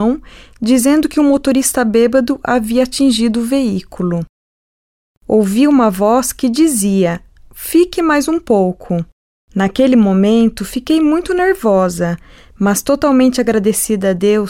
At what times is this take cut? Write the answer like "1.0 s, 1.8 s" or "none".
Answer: 5.1 s, 9.5 s